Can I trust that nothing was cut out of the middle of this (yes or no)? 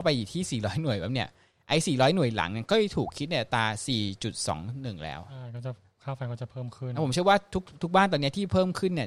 yes